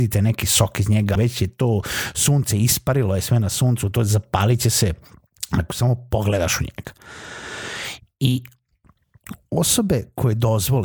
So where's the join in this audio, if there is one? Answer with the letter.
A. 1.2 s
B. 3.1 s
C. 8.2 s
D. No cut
A